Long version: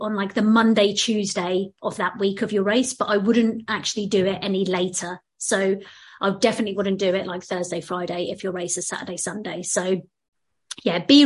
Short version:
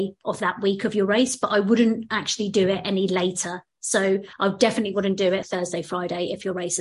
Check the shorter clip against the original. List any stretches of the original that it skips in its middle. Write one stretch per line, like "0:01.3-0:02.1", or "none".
0:05.9-0:06.1
0:07.2-0:07.4